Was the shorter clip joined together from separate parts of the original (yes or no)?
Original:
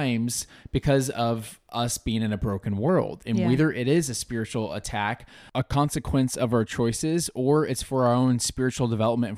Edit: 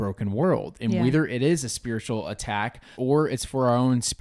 yes